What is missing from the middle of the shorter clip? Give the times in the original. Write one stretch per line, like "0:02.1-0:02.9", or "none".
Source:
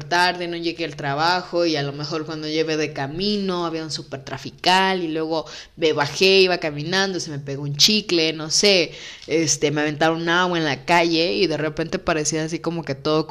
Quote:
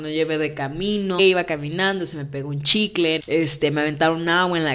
0:03.6-0:06.3
0:08.3-0:09.2